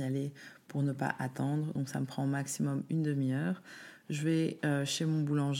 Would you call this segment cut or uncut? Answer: uncut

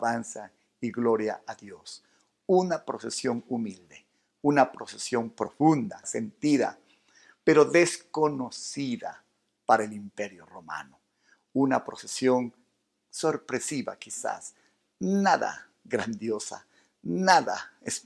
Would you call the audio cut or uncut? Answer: cut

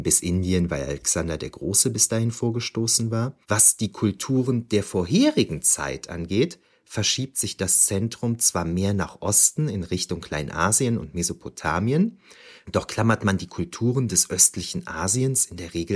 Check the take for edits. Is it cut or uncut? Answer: cut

